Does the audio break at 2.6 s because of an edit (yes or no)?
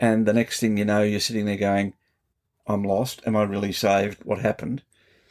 yes